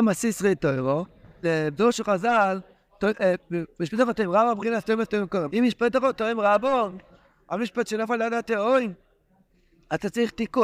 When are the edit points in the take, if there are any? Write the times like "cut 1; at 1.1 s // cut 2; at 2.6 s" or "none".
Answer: cut 1; at 1.4 s // cut 2; at 5.5 s